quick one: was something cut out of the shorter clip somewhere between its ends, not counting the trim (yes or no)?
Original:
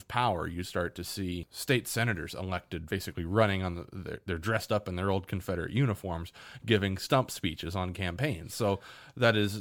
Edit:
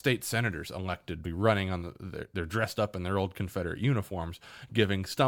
yes